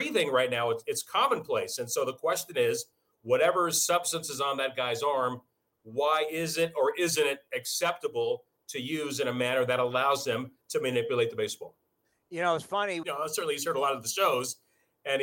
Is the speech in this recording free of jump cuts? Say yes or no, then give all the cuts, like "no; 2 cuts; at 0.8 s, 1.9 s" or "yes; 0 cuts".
no; 1 cut; at 13.0 s